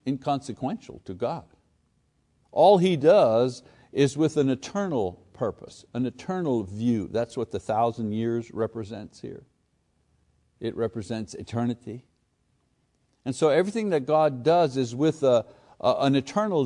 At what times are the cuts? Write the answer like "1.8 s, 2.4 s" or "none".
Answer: 1.0 s

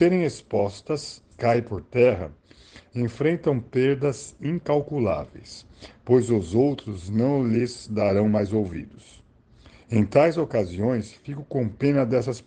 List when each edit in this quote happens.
1.3 s

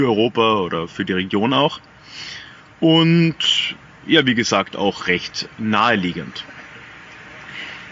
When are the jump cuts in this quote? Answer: none

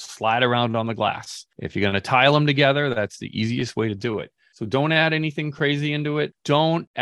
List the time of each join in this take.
none

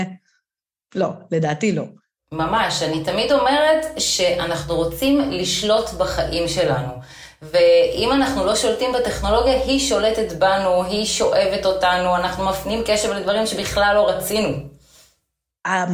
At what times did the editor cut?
none

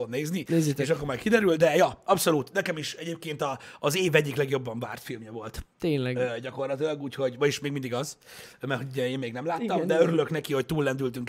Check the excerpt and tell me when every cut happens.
none

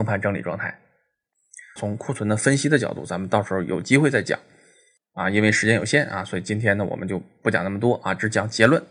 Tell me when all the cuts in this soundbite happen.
1.8 s

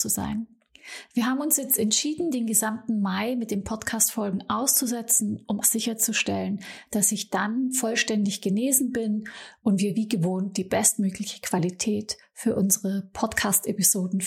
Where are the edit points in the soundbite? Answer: 5.6 s

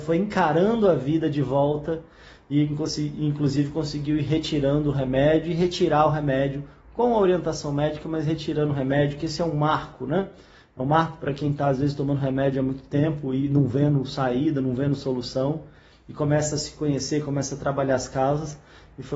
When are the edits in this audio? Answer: none

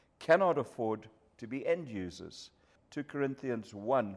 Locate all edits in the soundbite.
2.8 s

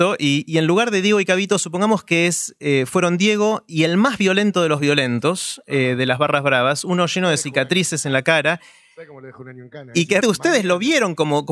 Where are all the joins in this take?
10.2 s

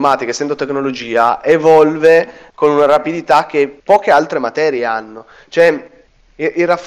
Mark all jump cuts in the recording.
3.8 s

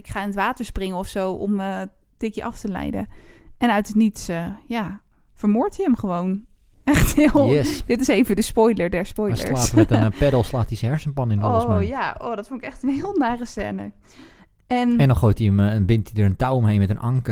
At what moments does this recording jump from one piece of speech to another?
none

